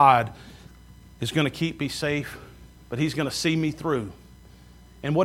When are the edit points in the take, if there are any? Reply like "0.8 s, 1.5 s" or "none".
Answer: 2.8 s